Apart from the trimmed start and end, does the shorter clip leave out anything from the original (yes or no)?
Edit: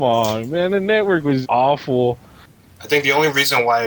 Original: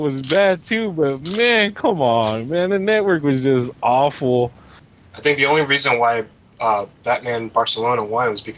yes